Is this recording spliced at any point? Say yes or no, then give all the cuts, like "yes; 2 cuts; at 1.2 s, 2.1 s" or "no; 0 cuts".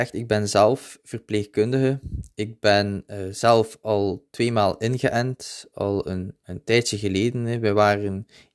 no; 0 cuts